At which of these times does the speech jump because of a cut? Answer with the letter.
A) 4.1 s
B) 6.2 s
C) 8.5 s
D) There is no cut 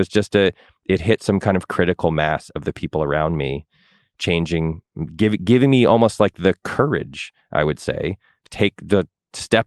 C